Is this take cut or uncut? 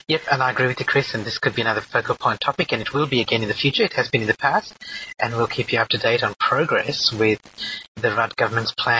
uncut